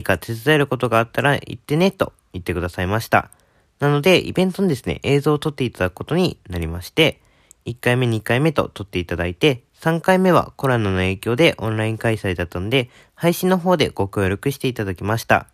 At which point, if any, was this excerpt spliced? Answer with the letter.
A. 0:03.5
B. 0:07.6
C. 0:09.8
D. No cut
D